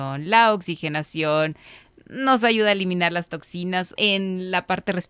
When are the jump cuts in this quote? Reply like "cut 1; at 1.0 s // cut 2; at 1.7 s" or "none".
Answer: cut 1; at 4.0 s